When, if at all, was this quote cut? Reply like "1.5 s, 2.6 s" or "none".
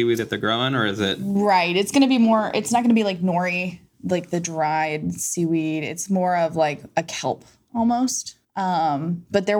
8.4 s